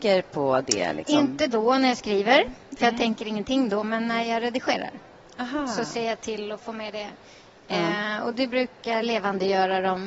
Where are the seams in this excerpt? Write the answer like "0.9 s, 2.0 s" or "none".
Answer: none